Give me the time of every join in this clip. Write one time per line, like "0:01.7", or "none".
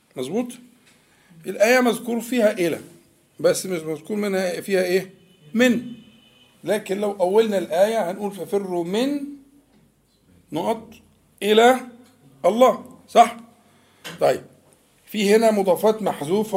none